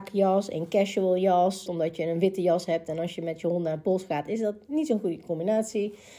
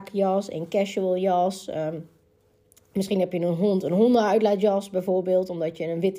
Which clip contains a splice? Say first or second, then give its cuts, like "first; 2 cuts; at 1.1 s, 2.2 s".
first; 1 cut; at 1.7 s